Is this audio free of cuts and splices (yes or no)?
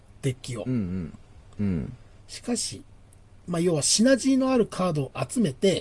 no